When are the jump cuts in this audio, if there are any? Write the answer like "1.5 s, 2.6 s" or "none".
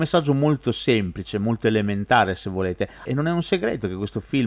3.1 s